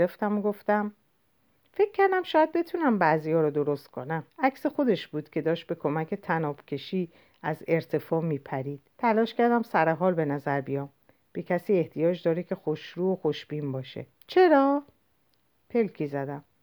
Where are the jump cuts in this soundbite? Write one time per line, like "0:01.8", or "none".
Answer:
0:04.3
0:08.9
0:14.1